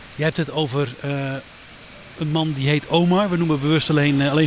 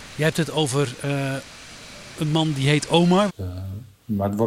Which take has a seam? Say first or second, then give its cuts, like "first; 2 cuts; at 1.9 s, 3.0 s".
second; 1 cut; at 3.3 s